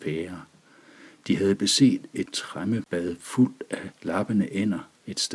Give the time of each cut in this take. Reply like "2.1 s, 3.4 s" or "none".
none